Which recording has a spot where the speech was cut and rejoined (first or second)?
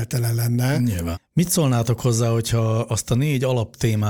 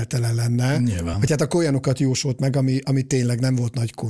first